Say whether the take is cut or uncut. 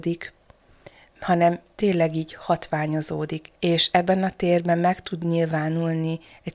cut